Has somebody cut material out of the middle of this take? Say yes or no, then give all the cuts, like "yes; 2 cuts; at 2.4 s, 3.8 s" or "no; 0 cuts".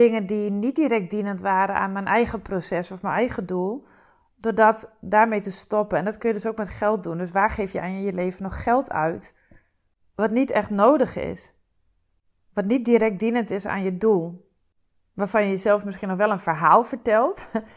no; 0 cuts